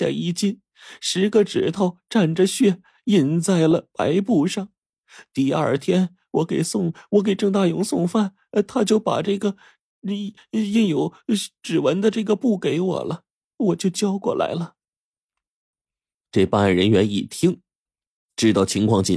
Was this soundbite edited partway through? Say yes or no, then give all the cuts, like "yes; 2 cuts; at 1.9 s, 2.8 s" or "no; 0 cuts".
no; 0 cuts